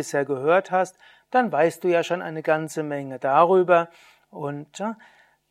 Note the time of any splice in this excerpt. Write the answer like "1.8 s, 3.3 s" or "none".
none